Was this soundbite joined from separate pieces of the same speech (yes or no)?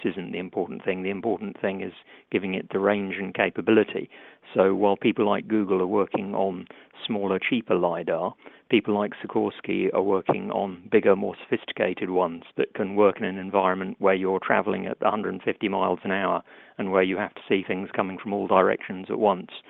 yes